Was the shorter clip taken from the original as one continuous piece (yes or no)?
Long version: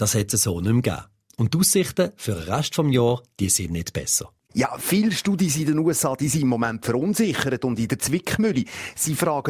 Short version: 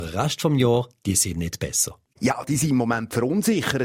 no